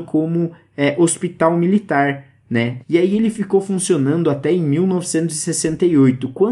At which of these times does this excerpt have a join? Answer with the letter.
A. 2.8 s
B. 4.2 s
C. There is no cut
A